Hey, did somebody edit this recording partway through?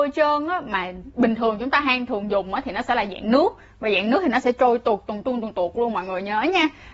yes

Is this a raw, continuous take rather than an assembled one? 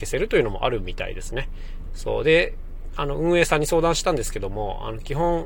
no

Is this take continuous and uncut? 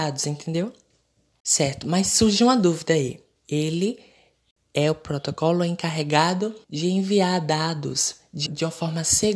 no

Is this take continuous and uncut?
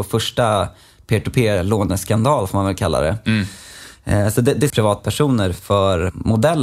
no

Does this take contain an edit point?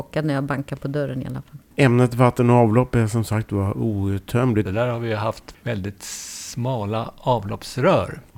yes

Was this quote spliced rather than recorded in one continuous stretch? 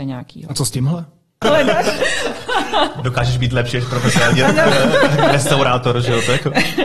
yes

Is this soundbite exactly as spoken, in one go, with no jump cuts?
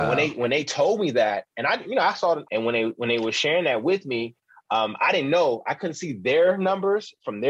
no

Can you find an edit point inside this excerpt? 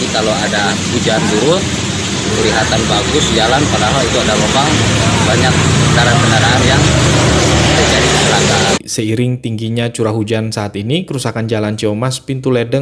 yes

